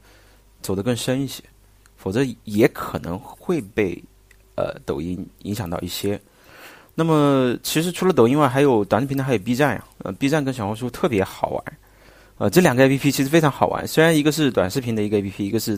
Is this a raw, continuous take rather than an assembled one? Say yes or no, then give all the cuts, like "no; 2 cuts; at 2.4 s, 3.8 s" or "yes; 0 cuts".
yes; 0 cuts